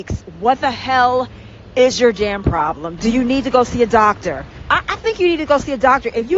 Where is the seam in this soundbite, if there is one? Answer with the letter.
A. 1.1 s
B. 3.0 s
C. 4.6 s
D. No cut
B